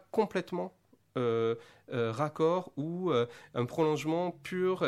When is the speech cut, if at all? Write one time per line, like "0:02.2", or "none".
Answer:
none